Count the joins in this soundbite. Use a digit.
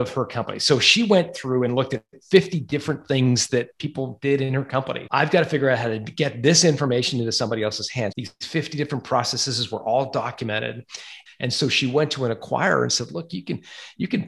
3